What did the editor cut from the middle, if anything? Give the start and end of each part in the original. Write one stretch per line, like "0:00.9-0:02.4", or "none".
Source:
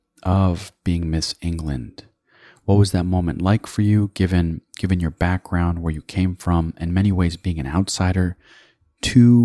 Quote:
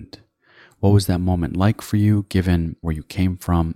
0:04.7-0:05.8